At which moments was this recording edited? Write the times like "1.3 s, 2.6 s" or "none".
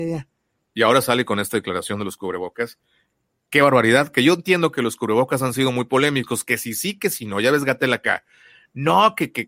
none